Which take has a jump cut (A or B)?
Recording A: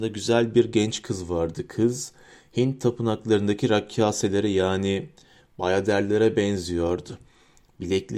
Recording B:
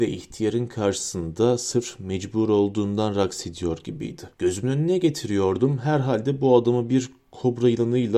B